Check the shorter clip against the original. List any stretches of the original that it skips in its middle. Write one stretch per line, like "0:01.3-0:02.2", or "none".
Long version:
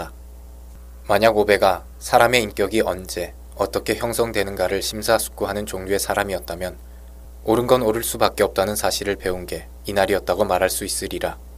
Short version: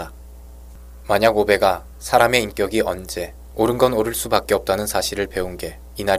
0:03.5-0:07.4